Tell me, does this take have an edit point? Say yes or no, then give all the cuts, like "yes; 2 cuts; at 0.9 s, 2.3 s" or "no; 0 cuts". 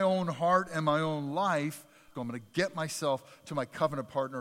yes; 1 cut; at 2.1 s